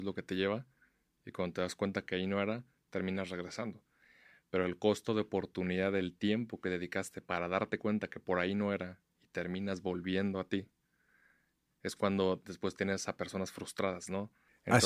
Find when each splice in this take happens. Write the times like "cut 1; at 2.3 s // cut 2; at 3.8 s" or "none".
none